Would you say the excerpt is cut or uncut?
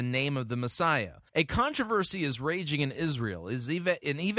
cut